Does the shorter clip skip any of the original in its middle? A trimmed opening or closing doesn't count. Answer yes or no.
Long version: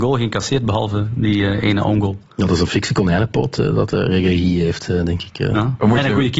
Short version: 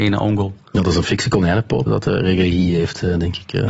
yes